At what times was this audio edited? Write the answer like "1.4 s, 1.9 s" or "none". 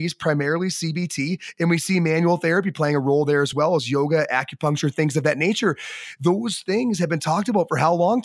none